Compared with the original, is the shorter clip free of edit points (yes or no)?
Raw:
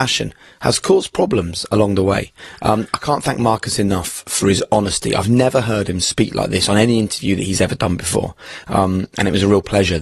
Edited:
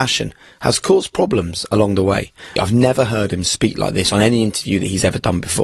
no